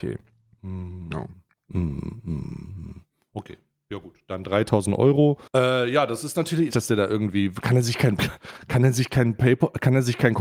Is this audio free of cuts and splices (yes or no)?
no